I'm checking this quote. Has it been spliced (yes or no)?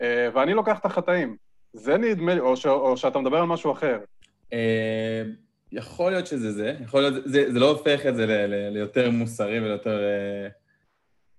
no